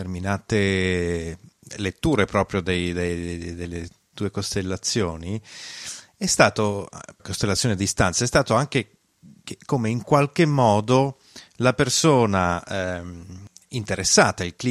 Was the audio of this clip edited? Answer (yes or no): yes